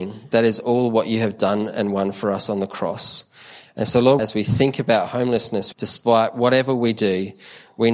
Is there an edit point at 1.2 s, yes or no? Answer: no